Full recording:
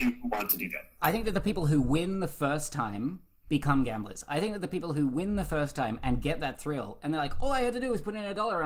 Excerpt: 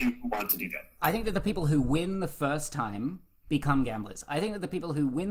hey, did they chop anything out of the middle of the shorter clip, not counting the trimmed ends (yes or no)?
no